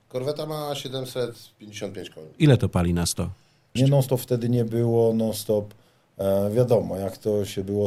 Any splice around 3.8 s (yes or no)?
yes